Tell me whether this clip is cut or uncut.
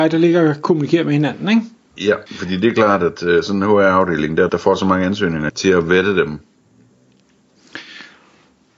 cut